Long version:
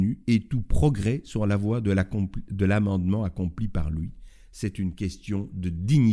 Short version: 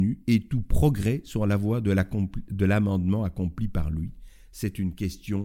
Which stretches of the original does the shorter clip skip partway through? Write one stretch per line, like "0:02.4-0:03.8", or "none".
none